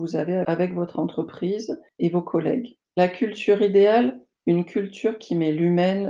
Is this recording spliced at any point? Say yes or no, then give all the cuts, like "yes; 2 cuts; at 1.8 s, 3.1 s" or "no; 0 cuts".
yes; 1 cut; at 2.8 s